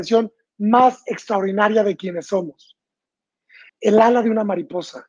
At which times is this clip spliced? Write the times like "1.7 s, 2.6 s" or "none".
3.7 s